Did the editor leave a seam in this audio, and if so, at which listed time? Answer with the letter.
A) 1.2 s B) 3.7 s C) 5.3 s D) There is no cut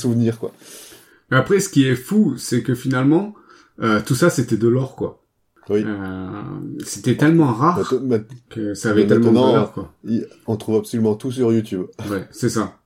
D